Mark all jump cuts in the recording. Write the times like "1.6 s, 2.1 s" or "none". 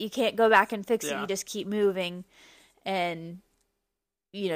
none